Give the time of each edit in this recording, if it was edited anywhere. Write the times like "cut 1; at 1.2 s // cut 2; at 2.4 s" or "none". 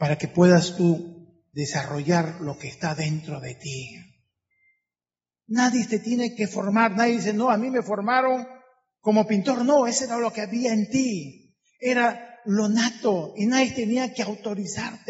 none